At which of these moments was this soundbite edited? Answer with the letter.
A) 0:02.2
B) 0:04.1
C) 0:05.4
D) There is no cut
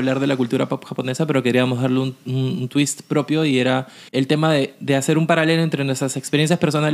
B